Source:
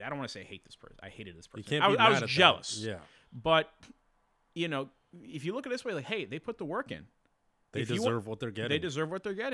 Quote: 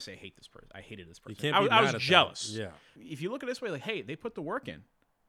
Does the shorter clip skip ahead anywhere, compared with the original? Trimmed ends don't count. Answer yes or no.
yes